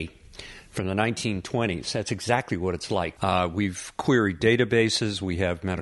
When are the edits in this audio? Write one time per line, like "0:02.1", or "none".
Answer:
0:03.2